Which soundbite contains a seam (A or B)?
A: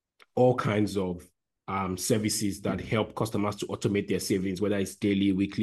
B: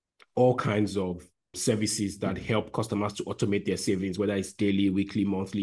B